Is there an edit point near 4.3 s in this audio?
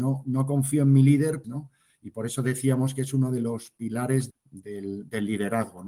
yes; 2 cuts; at 1.4 s, 4.3 s

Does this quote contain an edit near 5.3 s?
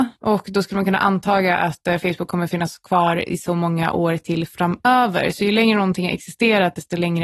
no; 0 cuts

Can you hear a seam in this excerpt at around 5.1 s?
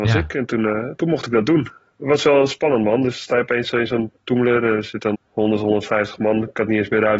yes; 1 cut; at 5.1 s

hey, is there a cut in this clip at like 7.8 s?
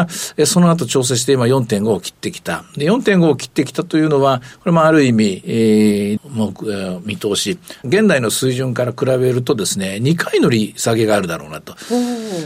yes; 2 cuts; at 6.2 s, 7.8 s

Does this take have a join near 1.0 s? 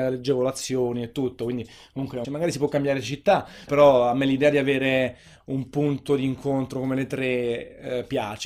no; 2 cuts; at 2.2 s, 3.7 s

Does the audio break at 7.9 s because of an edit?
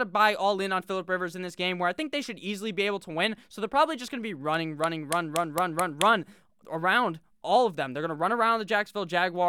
no; 0 cuts

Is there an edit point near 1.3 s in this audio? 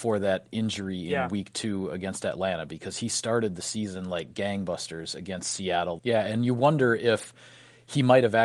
no; 1 cut; at 6.0 s

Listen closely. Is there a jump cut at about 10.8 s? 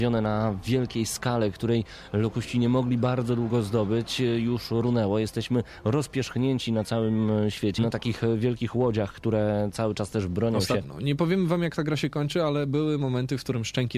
yes; 2 cuts; at 7.8 s, 10.8 s

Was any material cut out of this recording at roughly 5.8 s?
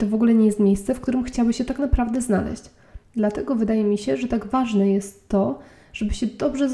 no; 1 cut; at 3.0 s

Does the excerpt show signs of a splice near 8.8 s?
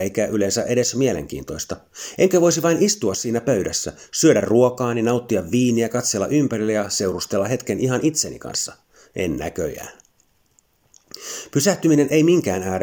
no; 0 cuts

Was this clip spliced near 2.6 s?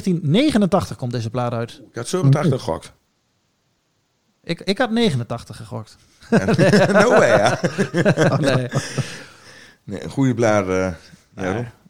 no; 0 cuts

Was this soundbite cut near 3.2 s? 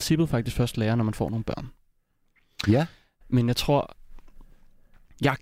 yes; 1 cut; at 3.2 s

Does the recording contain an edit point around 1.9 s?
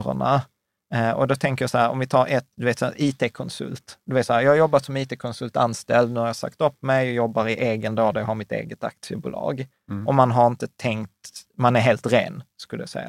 no; 0 cuts

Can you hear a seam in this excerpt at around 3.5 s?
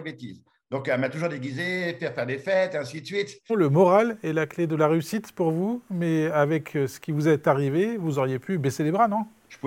yes; 1 cut; at 3.5 s

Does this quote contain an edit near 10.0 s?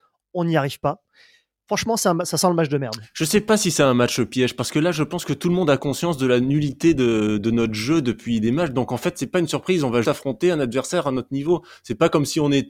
yes; 1 cut; at 10.0 s

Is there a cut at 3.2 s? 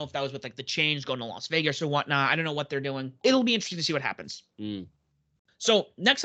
yes; 1 cut; at 3.2 s

